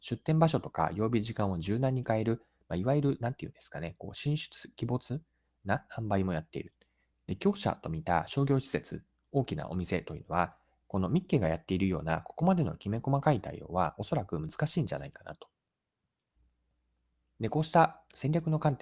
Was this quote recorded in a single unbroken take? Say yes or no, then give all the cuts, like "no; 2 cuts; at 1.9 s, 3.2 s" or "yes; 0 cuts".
no; 1 cut; at 7.1 s